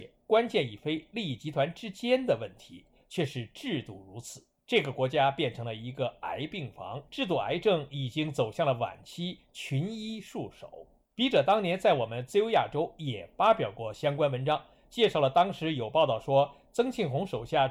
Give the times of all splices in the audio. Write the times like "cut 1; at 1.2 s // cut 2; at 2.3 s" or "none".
cut 1; at 7.1 s

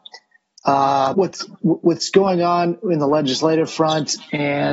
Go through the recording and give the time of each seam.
cut 1; at 1.1 s

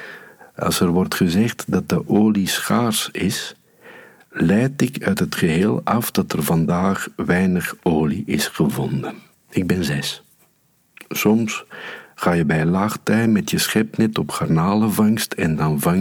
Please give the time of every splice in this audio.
cut 1; at 9.3 s

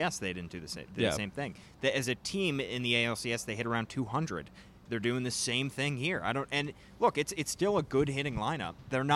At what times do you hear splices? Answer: none

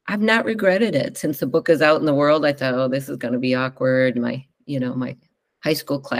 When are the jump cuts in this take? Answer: none

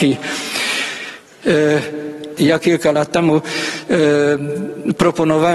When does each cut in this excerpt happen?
cut 1; at 2.4 s

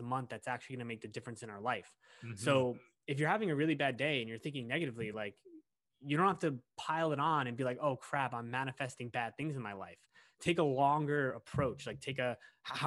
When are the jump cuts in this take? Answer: none

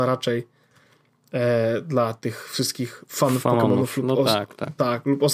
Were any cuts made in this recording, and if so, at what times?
none

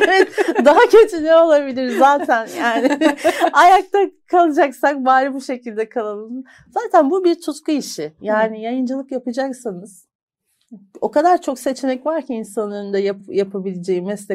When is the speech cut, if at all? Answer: none

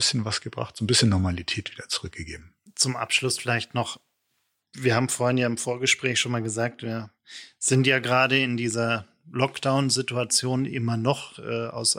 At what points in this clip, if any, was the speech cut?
cut 1; at 2.7 s

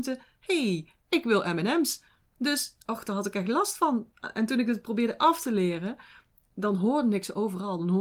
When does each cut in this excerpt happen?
none

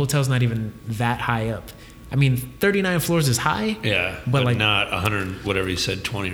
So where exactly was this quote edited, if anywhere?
none

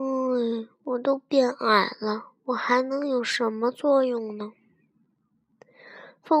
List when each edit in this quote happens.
none

